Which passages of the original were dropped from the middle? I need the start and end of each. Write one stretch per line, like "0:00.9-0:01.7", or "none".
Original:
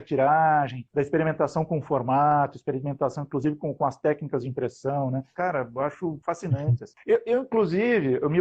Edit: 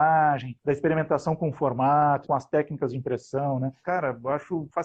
0:02.5-0:03.7